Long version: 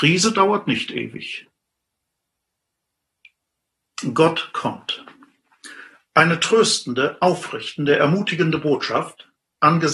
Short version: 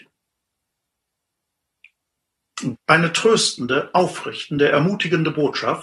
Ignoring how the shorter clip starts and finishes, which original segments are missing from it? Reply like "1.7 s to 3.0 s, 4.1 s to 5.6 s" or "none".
4.1 s to 6.0 s